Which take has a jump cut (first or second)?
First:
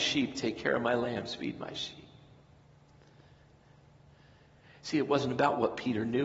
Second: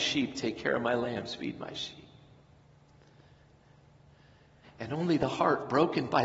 second